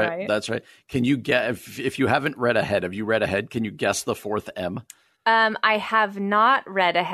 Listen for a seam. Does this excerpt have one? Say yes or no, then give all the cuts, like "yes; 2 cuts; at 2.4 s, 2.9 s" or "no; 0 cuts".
no; 0 cuts